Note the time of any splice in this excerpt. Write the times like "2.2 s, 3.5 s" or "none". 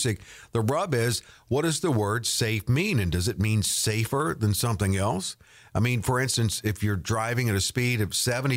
none